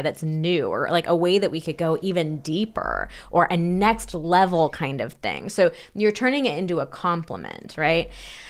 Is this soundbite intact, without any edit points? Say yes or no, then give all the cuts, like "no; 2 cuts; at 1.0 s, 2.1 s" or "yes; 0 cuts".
yes; 0 cuts